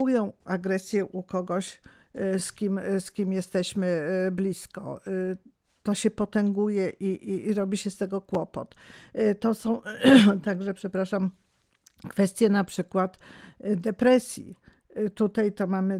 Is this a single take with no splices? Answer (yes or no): yes